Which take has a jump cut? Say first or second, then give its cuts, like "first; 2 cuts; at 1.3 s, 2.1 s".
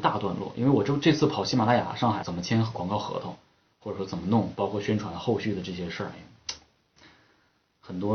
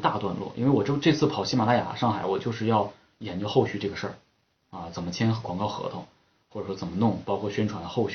first; 1 cut; at 2.2 s